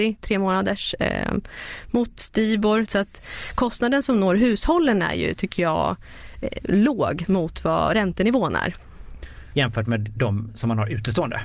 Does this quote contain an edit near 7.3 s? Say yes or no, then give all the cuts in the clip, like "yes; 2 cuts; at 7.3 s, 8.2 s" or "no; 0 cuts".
yes; 3 cuts; at 2.9 s, 7.3 s, 9.5 s